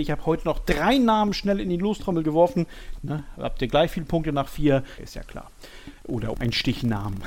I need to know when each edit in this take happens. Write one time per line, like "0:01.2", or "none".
0:03.0
0:05.0
0:06.3